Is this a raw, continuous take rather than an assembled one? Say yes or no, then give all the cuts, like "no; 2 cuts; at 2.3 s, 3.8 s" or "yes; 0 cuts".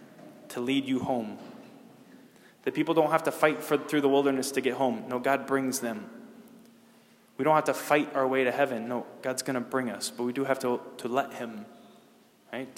yes; 0 cuts